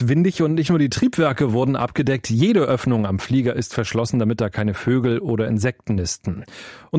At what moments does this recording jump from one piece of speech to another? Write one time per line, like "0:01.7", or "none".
none